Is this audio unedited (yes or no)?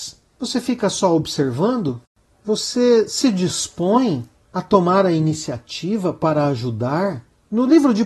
yes